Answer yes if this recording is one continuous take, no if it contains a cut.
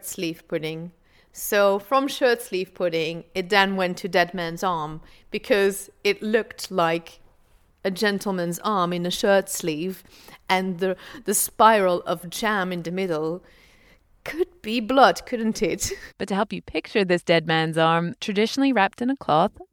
no